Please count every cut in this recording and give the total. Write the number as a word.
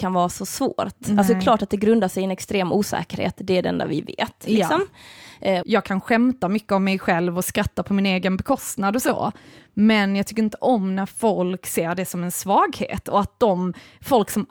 one